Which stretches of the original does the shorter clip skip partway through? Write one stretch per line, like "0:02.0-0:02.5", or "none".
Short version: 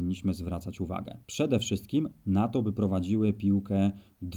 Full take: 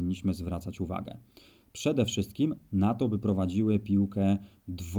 0:01.2-0:01.7

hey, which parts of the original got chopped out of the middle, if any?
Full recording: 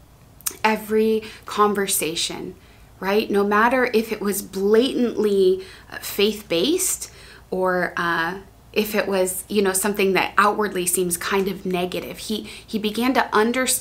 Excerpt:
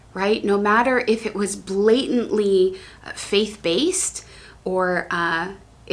none

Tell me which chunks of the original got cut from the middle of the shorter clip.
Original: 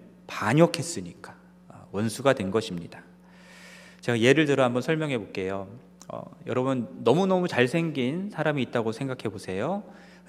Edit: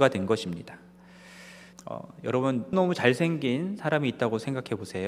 0:04.0-0:06.0
0:07.0-0:07.3

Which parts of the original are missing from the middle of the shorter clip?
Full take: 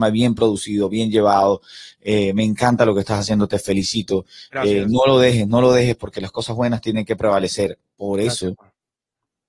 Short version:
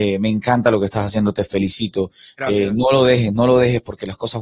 none

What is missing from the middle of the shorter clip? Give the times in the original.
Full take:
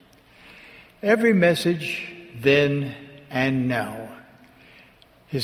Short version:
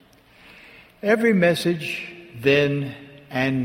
none

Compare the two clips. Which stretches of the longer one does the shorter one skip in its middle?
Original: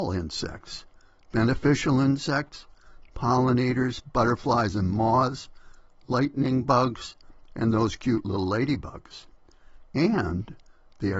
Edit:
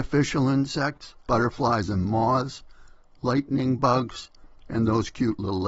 0:02.8-0:04.1

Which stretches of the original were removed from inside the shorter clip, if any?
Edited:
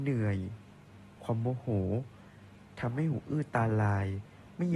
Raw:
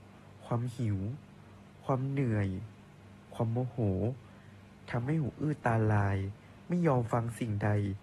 none

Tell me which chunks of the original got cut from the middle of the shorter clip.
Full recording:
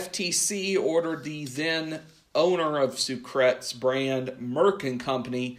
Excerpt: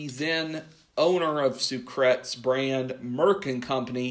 none

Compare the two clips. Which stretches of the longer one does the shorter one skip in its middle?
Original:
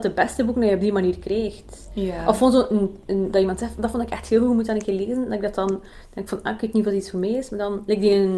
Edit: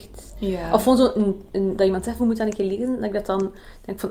0:03.7-0:04.5

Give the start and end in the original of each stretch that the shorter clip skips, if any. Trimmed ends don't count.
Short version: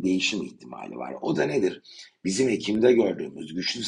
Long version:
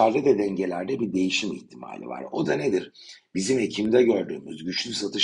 none

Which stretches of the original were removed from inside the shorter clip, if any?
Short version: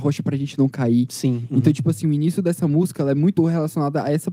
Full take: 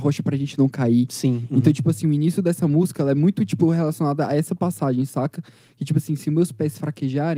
0:03.4-0:03.6

